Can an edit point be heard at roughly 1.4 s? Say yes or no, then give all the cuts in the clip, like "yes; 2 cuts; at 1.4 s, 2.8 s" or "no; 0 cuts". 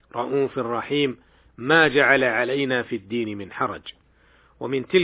no; 0 cuts